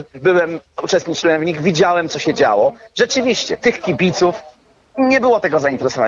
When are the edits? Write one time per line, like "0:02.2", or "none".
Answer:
none